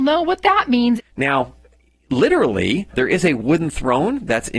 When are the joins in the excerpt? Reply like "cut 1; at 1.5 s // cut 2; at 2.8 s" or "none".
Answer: cut 1; at 1.0 s // cut 2; at 2.9 s